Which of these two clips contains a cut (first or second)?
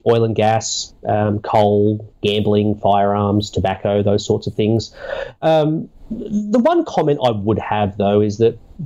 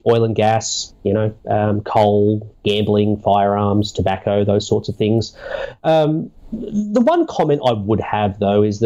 first